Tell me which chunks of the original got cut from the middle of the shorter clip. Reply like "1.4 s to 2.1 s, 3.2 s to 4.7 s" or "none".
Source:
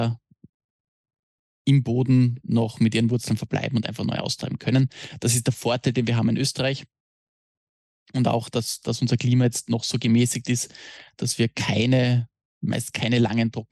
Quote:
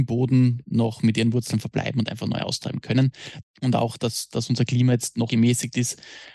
5.2 s to 7.9 s, 9.8 s to 10.0 s